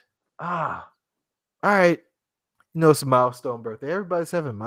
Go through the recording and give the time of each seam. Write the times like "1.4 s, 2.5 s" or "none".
2.6 s

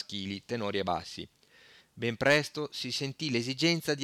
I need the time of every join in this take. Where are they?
1.8 s

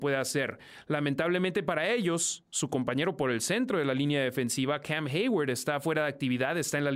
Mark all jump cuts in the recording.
none

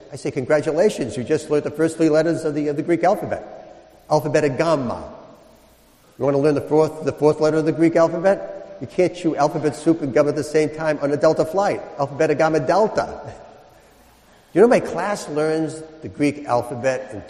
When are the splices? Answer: none

